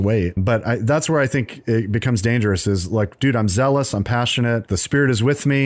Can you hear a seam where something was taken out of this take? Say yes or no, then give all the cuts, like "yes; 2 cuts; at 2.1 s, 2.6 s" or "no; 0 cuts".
no; 0 cuts